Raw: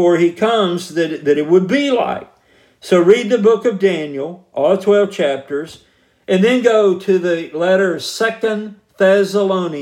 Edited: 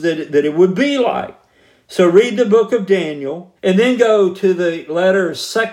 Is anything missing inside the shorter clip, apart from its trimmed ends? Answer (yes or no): yes